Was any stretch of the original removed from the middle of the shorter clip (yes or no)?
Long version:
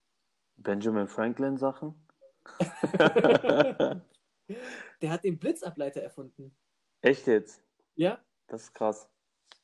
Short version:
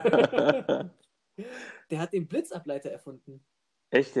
no